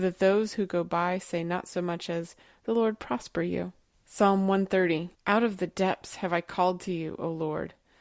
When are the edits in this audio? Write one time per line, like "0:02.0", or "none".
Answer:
0:03.9
0:05.1